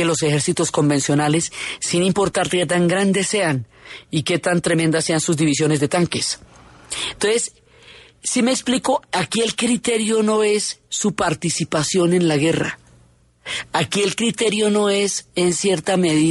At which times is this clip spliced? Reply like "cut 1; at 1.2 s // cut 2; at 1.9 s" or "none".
none